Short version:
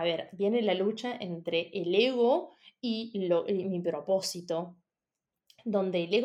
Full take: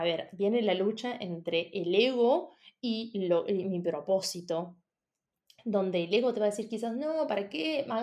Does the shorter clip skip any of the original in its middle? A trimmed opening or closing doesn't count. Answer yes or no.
no